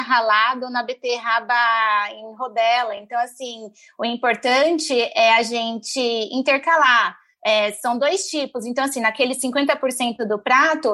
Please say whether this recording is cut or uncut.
uncut